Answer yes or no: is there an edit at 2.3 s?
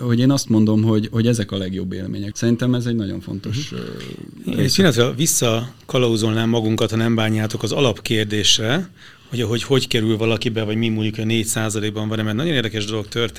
yes